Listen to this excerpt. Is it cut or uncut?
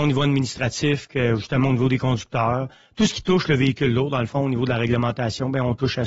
uncut